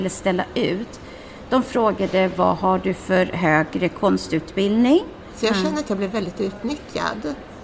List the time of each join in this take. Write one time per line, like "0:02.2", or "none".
0:05.3